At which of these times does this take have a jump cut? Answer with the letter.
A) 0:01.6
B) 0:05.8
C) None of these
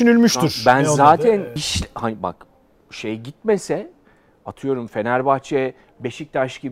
A